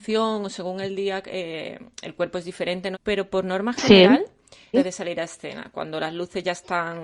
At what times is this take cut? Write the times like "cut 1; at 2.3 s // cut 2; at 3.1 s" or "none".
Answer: cut 1; at 2.9 s // cut 2; at 4.7 s